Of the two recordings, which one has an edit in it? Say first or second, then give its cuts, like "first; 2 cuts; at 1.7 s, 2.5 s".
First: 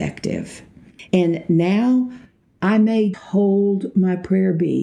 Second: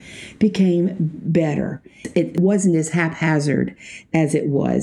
first; 2 cuts; at 1.1 s, 3.1 s